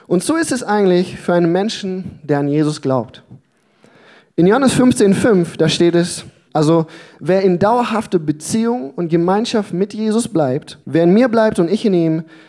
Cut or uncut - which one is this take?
cut